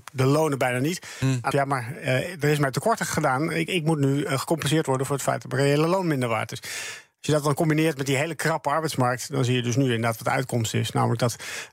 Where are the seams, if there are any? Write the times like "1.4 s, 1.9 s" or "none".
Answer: 1.5 s